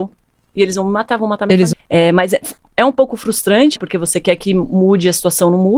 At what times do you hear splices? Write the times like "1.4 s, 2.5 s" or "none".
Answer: 1.7 s, 3.8 s

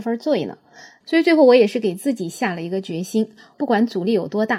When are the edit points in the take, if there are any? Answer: 1.0 s, 3.5 s

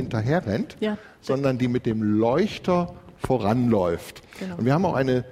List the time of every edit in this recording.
none

